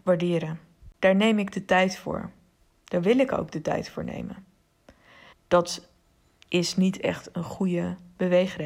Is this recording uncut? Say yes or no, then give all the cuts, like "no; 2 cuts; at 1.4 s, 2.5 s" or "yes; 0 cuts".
no; 1 cut; at 5.3 s